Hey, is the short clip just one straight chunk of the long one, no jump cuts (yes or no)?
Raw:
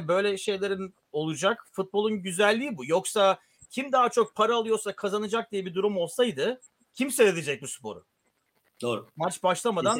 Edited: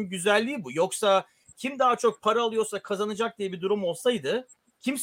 yes